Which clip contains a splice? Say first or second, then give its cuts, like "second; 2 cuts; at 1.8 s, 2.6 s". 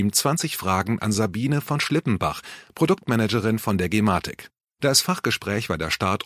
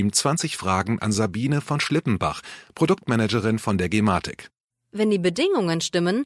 second; 1 cut; at 4.7 s